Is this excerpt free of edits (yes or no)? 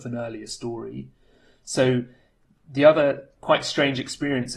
yes